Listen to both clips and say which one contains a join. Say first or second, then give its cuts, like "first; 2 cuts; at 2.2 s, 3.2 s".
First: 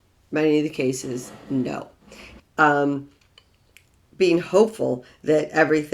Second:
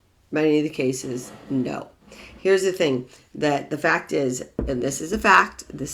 first; 1 cut; at 2.4 s